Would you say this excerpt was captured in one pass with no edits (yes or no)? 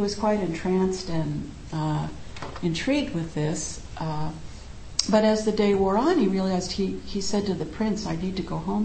yes